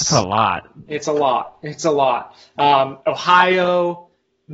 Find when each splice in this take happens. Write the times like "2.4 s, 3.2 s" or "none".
none